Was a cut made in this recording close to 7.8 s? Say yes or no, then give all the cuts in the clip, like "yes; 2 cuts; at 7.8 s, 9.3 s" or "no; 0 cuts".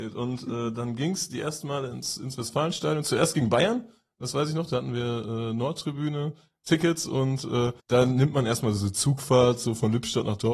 yes; 1 cut; at 7.8 s